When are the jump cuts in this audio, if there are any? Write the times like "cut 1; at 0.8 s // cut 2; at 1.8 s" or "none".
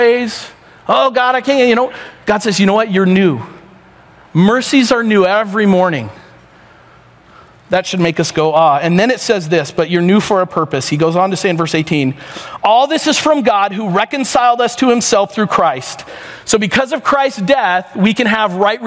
none